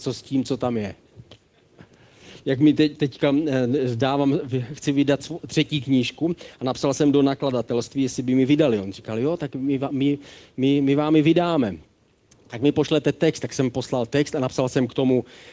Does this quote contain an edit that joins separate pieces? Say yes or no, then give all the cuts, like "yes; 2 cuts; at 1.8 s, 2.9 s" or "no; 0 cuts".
no; 0 cuts